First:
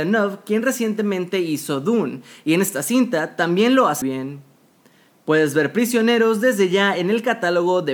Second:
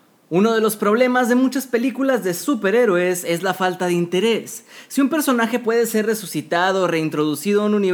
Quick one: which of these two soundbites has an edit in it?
first; 1 cut; at 4.0 s

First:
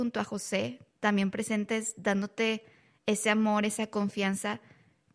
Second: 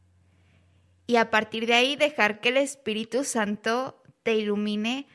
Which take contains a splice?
first; 1 cut; at 0.9 s

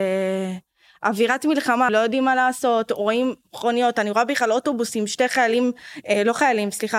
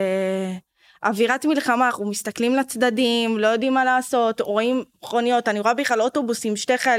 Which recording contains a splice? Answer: first; 1 cut; at 1.9 s

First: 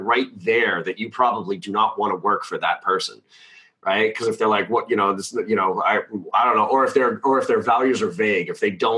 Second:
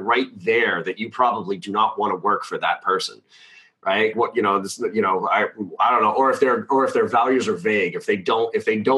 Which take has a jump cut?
second; 1 cut; at 4.1 s

